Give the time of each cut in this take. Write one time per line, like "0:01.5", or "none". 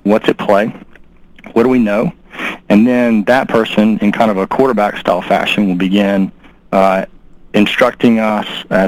none